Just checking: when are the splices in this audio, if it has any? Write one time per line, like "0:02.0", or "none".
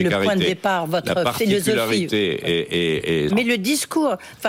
0:03.3